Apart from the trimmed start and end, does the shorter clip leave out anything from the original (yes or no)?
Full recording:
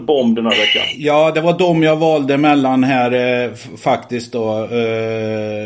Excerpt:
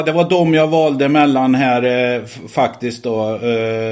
no